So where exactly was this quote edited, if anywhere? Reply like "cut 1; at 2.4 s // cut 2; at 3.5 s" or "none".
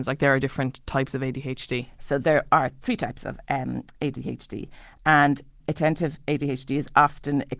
cut 1; at 2.0 s // cut 2; at 5.6 s